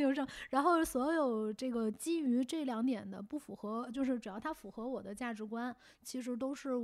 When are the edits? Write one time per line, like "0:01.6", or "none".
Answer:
0:03.9